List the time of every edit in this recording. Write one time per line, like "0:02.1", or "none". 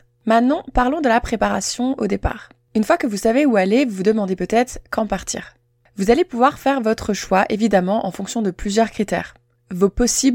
none